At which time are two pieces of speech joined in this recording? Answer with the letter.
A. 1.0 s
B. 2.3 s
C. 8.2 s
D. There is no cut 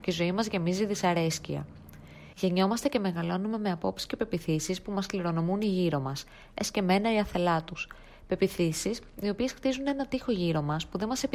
B